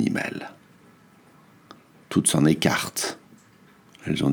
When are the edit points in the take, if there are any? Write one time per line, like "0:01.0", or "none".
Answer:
none